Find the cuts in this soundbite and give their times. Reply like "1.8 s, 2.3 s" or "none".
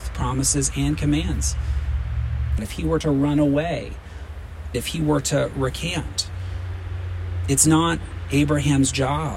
2.6 s, 4.7 s

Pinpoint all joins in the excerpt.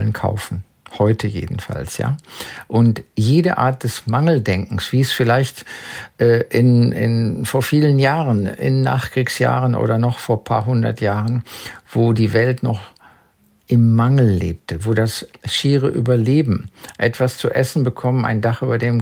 none

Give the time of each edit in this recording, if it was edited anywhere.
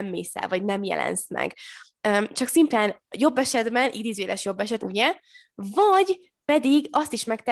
4.8 s

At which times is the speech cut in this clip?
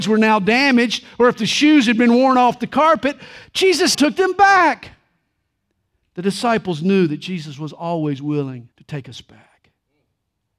3.9 s, 8.7 s

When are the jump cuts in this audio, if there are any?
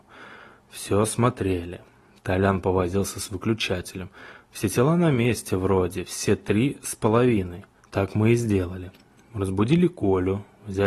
7.8 s

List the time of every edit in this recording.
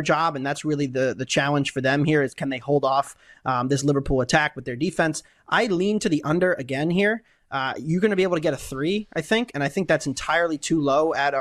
none

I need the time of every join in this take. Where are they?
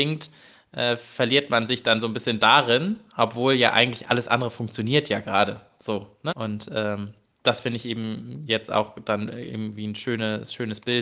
6.3 s

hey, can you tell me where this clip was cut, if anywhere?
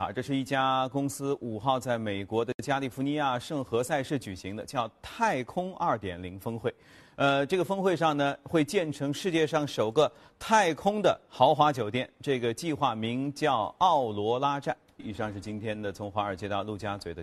15.0 s

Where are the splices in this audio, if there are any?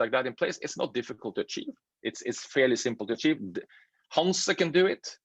none

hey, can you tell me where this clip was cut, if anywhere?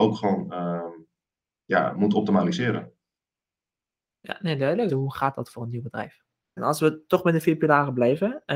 4.9 s, 6.6 s

